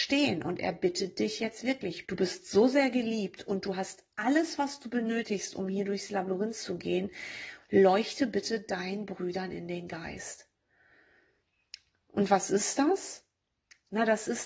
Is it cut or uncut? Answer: cut